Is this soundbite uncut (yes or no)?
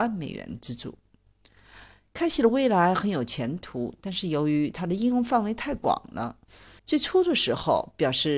no